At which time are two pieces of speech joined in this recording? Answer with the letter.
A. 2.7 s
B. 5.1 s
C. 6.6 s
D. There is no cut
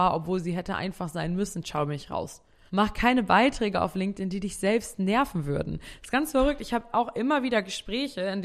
A